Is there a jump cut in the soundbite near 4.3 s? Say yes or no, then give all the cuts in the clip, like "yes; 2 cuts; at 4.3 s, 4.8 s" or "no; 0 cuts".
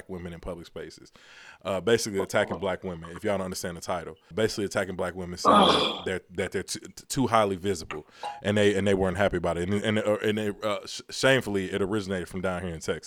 yes; 1 cut; at 4.3 s